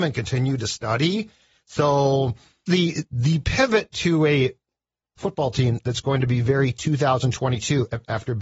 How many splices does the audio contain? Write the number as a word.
one